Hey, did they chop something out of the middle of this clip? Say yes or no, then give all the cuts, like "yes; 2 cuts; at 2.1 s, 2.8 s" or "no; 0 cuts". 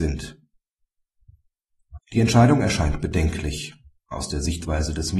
yes; 1 cut; at 2.0 s